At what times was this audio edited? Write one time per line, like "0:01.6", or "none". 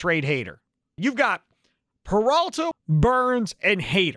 0:01.0
0:02.7

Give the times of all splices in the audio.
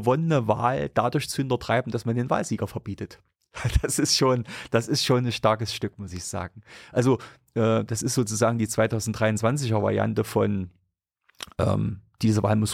none

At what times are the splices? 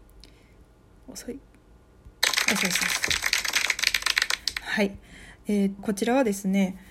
0:05.8

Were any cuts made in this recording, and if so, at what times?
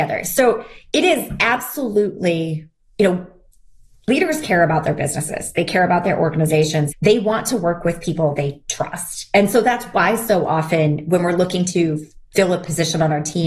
0:06.9

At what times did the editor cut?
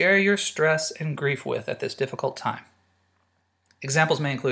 none

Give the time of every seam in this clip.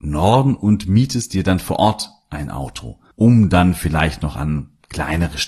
none

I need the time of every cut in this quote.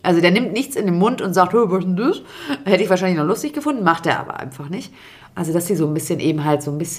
0:05.3

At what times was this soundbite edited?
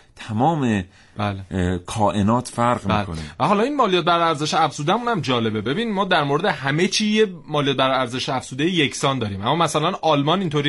none

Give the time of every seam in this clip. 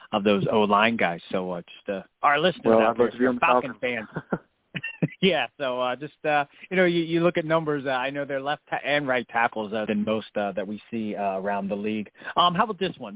0:09.9

